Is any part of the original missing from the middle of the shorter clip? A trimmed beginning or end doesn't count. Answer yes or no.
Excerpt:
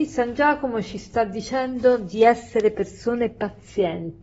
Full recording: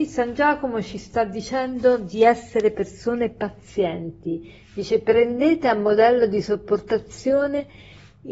no